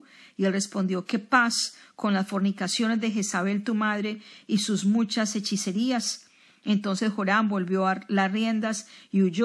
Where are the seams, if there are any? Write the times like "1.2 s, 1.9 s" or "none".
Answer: none